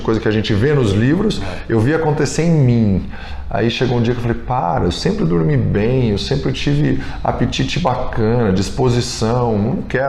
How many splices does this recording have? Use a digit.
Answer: 0